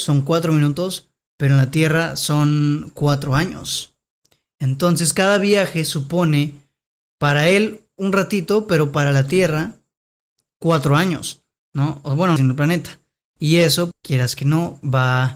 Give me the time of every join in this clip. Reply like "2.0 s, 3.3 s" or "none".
12.4 s, 13.9 s